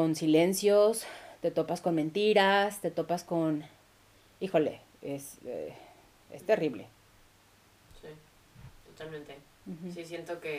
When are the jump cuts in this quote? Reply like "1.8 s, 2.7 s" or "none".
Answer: none

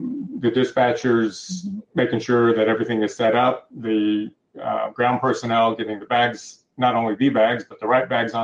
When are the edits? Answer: 3.7 s

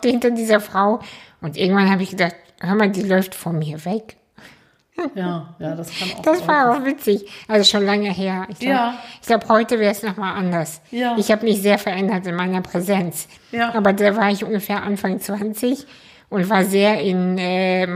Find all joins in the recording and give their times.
none

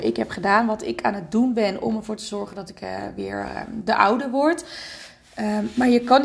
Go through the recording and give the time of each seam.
none

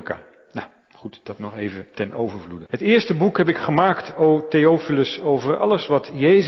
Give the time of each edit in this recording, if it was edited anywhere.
2.7 s

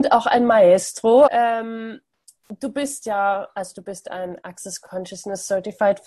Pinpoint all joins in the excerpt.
1.3 s

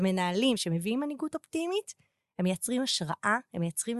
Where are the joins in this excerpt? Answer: none

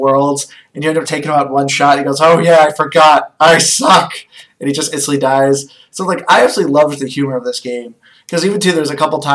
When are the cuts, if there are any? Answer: 1.1 s

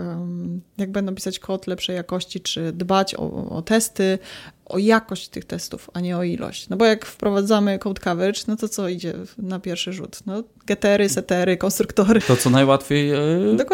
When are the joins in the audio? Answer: 3.2 s, 12.2 s

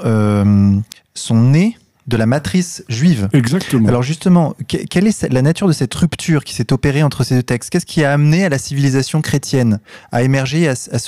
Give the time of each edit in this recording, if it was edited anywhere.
none

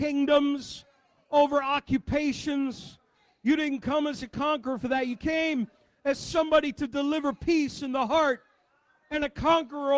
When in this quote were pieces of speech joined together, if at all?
none

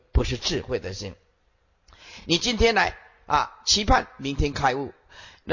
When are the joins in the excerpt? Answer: none

